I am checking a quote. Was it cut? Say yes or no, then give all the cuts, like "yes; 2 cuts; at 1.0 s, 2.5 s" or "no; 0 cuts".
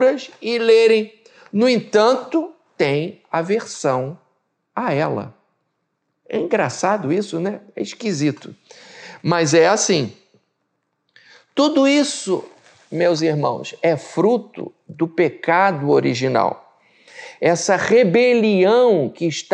no; 0 cuts